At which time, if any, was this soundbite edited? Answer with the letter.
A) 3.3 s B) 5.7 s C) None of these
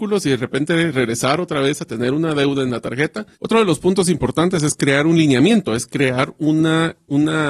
A